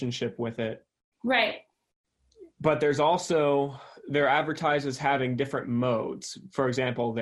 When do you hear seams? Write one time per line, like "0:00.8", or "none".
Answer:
none